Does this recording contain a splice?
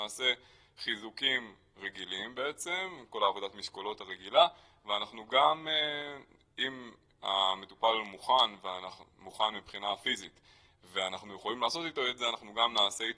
yes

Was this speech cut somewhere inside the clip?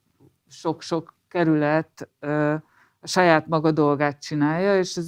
no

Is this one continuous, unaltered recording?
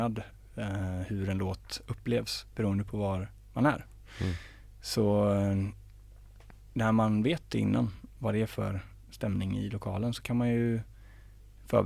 yes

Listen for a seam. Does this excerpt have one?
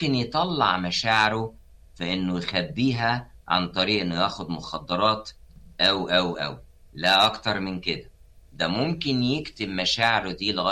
yes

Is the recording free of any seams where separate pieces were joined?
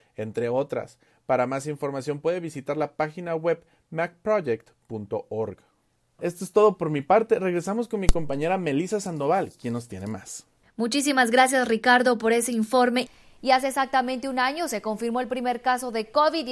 no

